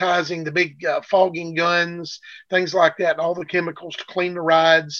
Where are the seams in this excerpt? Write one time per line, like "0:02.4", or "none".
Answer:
none